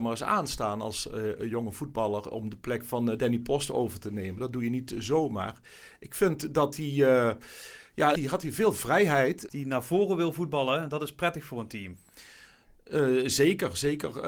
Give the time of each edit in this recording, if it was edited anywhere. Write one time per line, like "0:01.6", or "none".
0:08.2
0:09.5